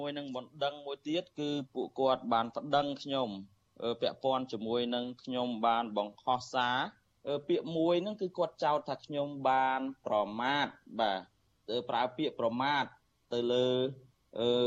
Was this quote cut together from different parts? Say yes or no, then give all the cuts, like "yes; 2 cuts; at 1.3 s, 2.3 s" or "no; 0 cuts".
no; 0 cuts